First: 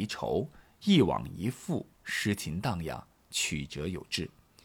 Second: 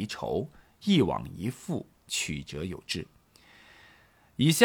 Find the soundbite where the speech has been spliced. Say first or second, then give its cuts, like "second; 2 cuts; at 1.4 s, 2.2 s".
second; 1 cut; at 2.0 s